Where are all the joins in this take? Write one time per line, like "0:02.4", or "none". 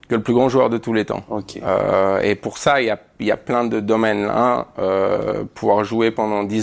none